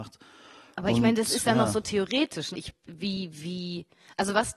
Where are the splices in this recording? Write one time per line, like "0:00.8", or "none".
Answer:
0:02.5

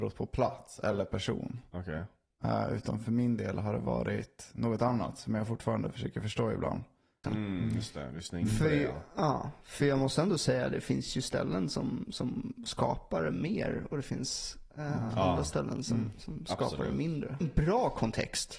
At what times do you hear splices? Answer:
0:07.2
0:17.4

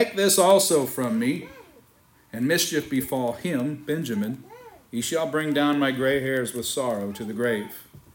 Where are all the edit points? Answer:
none

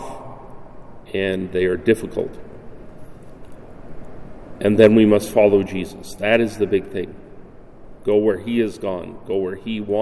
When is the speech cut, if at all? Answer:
0:08.0

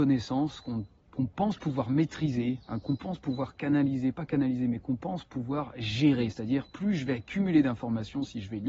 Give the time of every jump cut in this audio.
none

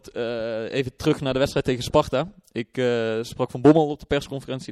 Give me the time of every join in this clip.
none

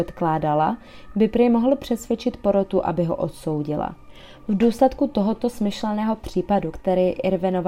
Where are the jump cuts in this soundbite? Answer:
none

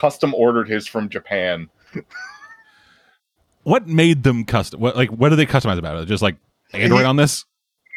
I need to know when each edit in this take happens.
0:03.6
0:06.7

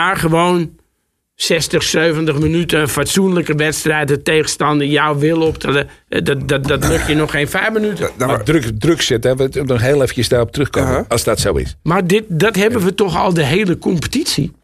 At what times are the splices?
0:08.2
0:11.1

